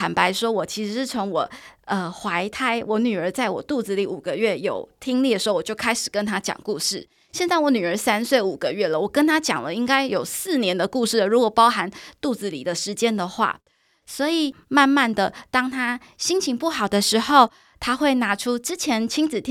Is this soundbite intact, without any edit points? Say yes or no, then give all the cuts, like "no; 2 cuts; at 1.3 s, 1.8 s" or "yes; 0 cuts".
yes; 0 cuts